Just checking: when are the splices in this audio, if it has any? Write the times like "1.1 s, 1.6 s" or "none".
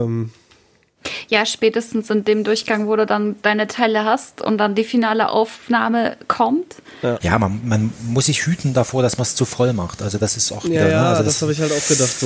7.2 s